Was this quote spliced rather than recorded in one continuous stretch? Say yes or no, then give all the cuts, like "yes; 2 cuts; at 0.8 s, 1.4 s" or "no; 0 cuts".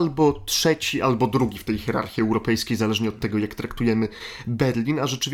no; 0 cuts